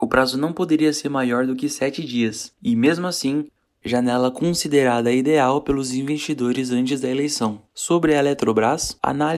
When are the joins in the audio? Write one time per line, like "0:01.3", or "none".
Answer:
0:03.7
0:07.6